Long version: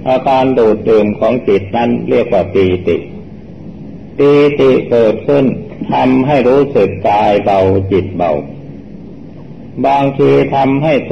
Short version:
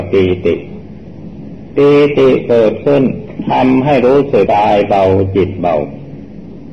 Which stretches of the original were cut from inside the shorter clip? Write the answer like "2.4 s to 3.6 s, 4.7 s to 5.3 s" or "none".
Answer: 6.9 s to 7.0 s